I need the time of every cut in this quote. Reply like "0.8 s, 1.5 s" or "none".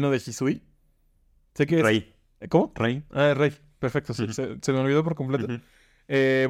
none